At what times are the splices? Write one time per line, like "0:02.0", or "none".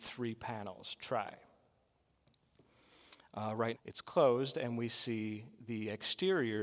0:03.7